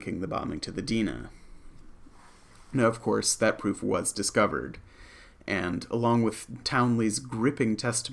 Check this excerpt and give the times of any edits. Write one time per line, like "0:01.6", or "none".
none